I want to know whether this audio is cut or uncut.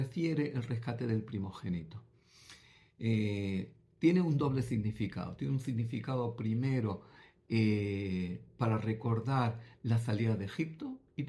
uncut